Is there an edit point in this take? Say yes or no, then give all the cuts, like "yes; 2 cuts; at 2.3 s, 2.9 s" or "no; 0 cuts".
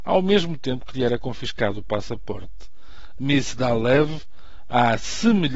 yes; 1 cut; at 3.2 s